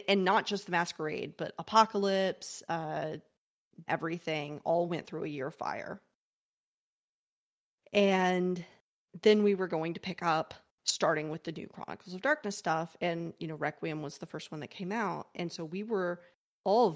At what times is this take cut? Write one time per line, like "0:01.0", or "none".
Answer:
0:03.9